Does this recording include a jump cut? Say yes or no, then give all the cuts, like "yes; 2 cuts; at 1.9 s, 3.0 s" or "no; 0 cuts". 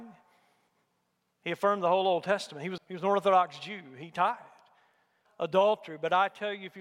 yes; 2 cuts; at 2.8 s, 5.3 s